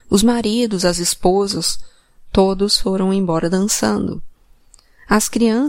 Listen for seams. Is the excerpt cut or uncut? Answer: uncut